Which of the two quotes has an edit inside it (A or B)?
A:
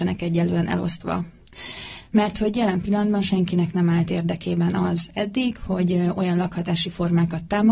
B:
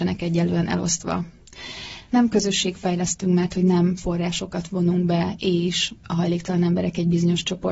B